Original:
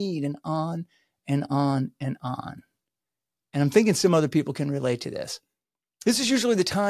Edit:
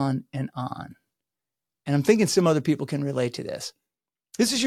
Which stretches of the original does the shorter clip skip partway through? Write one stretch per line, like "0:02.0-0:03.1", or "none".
none